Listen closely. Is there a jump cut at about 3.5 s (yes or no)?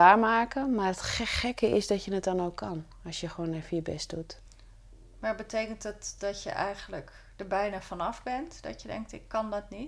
no